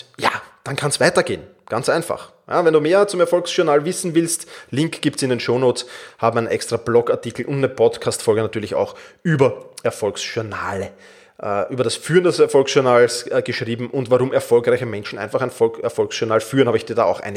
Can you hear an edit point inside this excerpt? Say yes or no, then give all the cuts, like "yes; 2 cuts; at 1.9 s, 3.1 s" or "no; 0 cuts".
no; 0 cuts